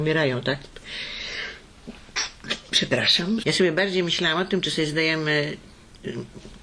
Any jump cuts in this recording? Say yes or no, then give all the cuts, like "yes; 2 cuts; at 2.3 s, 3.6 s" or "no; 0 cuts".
yes; 1 cut; at 3.4 s